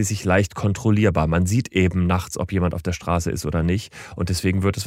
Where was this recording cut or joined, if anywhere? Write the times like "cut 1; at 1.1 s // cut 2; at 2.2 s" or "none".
none